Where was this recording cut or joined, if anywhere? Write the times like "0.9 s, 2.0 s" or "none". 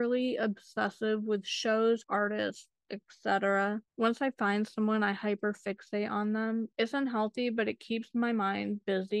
2.0 s, 3.9 s